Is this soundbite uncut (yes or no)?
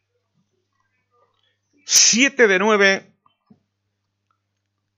yes